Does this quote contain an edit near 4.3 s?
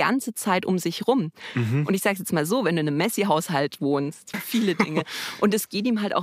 yes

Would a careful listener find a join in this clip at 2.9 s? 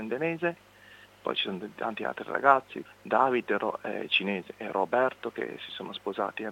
yes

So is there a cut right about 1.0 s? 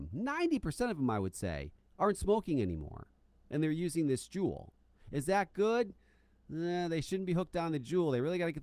no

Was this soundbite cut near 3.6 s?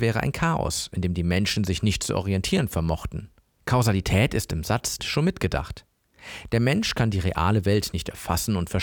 yes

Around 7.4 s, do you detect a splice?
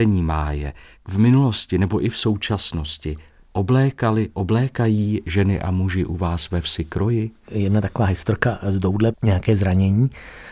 yes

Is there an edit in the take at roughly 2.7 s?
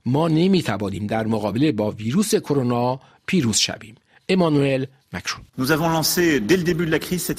no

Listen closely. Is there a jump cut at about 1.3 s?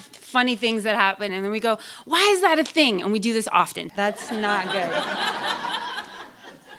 yes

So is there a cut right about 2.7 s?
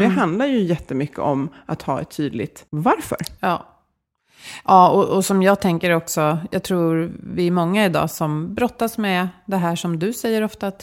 yes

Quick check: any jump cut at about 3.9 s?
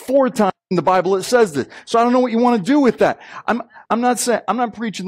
yes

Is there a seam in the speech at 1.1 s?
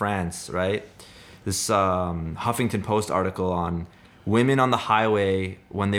no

